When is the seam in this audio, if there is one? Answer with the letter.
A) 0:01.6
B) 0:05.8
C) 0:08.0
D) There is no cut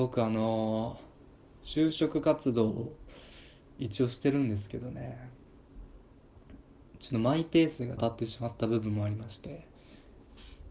C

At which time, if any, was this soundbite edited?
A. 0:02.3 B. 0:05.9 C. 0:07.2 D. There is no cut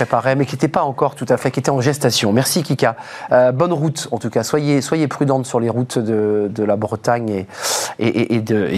D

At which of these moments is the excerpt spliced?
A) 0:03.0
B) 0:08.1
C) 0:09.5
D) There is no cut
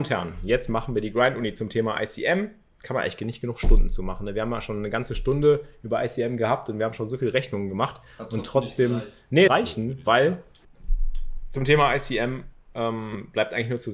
C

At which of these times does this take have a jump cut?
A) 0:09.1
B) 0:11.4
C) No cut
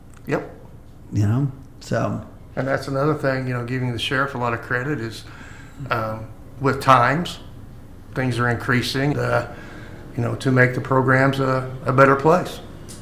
A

